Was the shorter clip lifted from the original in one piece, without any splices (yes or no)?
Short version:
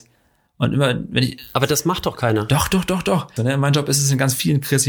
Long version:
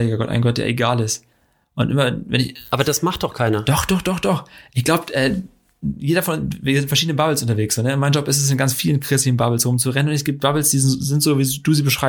no